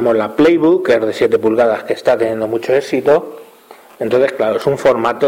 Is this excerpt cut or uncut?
uncut